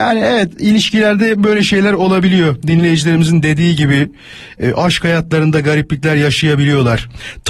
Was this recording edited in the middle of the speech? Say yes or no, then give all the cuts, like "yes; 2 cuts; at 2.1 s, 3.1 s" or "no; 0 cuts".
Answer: no; 0 cuts